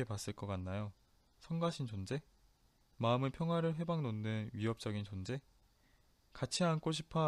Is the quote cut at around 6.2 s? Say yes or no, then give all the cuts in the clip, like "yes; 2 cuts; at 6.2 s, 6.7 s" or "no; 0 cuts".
yes; 1 cut; at 6.2 s